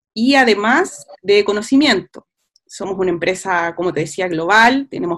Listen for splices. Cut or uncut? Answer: uncut